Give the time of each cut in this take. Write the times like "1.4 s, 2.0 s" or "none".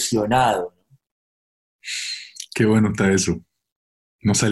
none